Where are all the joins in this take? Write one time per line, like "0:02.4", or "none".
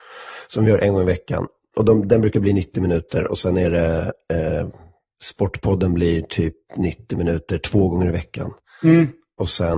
none